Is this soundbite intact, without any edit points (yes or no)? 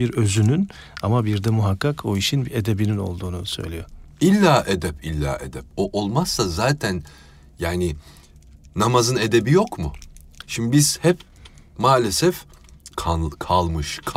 no